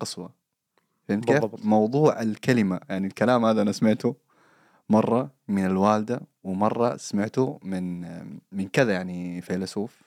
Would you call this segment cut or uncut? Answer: uncut